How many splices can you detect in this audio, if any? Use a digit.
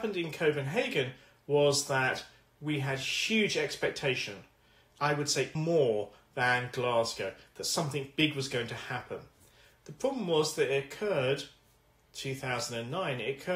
1